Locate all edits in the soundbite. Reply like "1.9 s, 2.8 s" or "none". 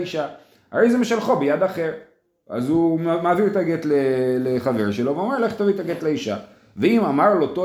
none